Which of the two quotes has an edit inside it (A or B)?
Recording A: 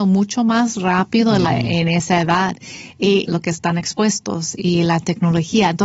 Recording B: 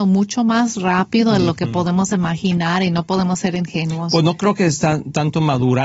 A